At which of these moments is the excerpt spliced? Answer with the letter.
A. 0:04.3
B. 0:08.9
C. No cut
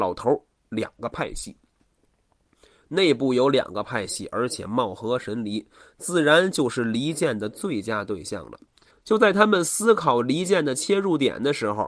B